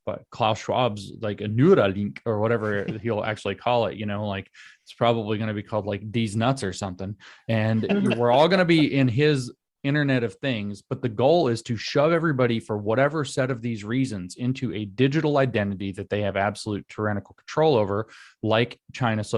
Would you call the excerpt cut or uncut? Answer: uncut